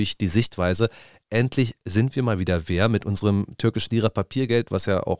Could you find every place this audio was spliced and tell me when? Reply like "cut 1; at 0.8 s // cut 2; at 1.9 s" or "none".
none